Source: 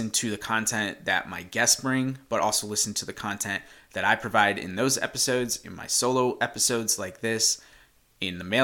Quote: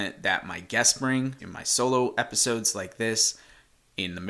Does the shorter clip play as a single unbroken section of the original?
no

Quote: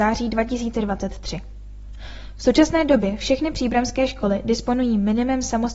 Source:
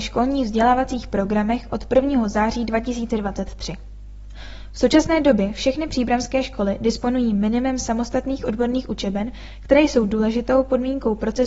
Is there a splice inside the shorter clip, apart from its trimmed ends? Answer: no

